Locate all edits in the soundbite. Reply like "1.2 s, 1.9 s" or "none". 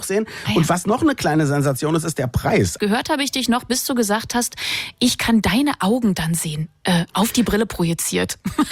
2.8 s

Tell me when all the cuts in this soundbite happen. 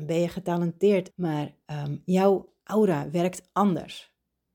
1.1 s

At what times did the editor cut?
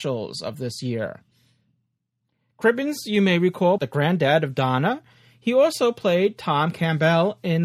3.8 s

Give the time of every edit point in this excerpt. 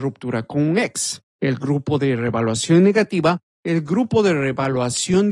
1.3 s

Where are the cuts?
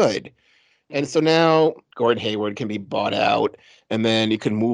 none

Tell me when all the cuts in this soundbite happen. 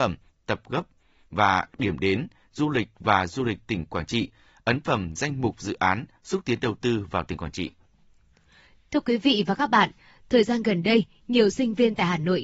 none

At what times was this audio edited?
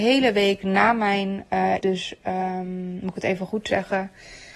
1.8 s

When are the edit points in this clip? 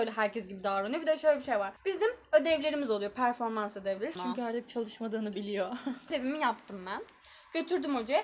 1.8 s, 4.2 s, 6.1 s

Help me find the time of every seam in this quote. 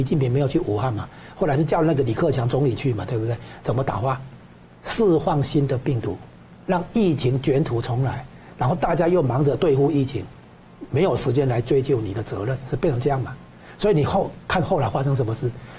3.6 s

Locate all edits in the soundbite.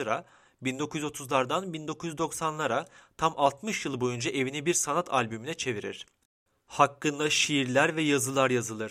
none

